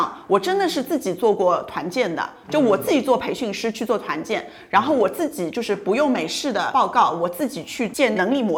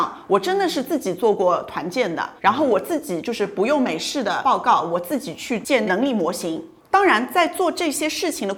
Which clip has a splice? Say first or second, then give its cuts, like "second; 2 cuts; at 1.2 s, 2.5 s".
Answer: second; 1 cut; at 2.4 s